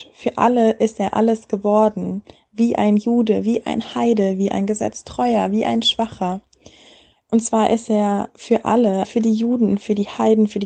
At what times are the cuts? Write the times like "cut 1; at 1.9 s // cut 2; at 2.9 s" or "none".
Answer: cut 1; at 7.2 s // cut 2; at 9.0 s